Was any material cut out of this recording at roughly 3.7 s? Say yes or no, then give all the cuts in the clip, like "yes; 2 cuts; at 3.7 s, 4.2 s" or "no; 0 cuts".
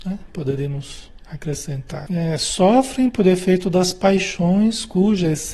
no; 1 cut; at 2.1 s